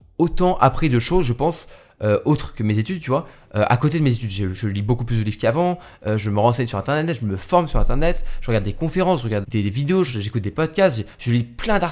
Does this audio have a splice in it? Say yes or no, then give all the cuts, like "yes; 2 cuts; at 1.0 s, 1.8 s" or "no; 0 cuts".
yes; 1 cut; at 9.4 s